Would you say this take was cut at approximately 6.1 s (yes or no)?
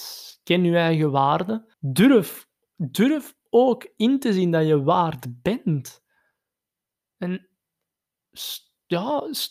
no